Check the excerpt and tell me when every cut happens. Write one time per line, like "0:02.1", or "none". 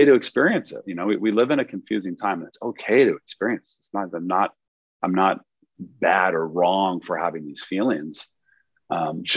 none

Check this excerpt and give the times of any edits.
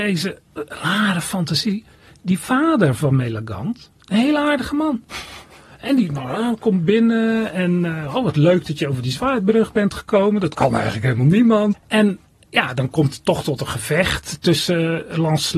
0:11.7

